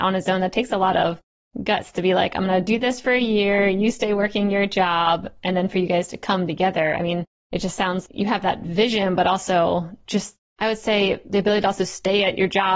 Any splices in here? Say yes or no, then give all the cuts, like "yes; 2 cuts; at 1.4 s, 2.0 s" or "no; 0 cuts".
yes; 1 cut; at 8.1 s